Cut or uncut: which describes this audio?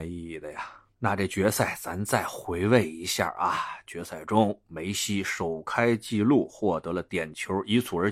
cut